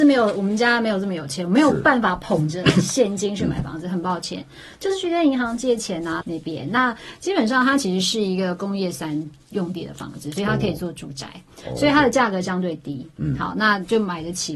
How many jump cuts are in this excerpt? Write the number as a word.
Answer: one